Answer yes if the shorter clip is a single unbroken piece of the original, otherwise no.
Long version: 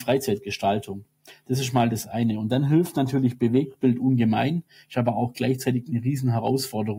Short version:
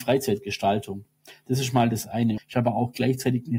no